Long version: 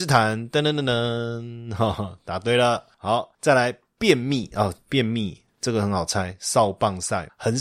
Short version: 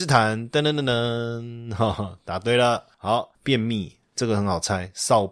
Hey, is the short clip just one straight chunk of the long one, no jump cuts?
no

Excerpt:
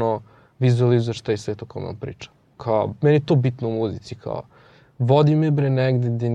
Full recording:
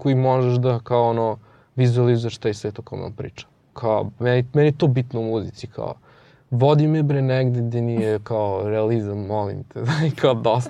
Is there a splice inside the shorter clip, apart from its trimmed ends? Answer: yes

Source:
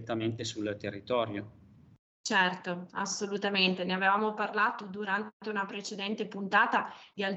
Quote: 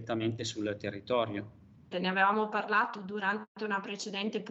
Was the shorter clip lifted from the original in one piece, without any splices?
no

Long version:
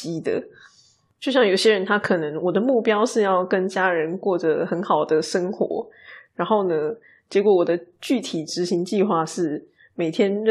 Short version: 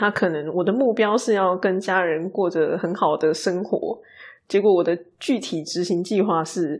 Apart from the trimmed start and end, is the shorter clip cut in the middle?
yes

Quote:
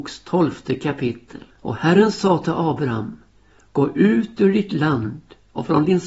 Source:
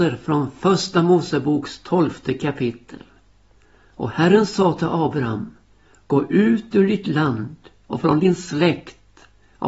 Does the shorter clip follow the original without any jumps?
no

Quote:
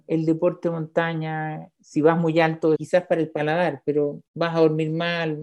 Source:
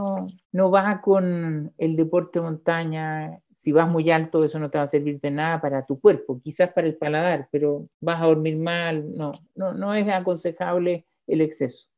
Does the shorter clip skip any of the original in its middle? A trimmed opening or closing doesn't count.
yes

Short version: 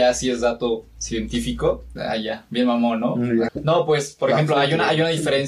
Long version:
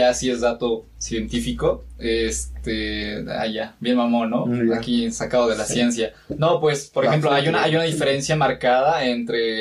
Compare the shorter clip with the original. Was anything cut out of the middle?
yes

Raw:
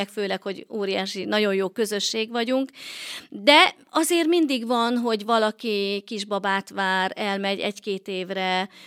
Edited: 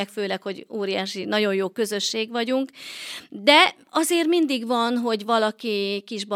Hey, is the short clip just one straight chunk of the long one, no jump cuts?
yes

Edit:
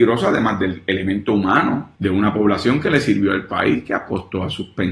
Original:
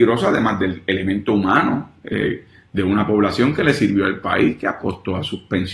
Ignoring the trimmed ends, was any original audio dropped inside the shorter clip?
yes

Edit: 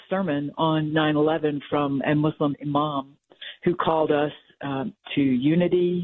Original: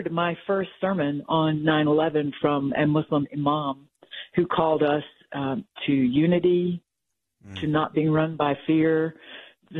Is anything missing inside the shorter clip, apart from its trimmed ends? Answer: no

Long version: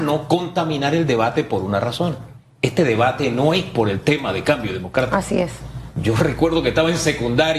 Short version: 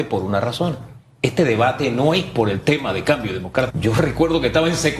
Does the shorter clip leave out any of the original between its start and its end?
yes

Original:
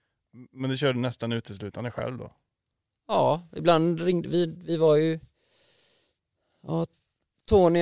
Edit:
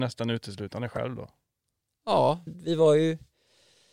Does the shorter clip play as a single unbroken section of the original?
no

